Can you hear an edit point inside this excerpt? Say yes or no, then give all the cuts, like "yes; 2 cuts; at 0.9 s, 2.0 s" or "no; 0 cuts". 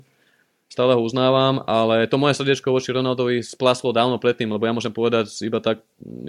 no; 0 cuts